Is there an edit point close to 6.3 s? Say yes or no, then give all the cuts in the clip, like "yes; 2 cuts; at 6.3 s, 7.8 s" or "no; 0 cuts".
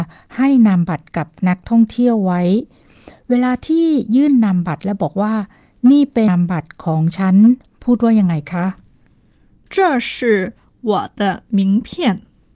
yes; 1 cut; at 6.3 s